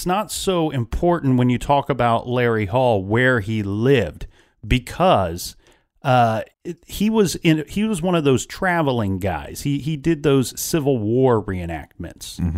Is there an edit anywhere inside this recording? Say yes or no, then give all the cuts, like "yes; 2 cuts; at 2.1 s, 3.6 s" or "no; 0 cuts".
yes; 1 cut; at 6.5 s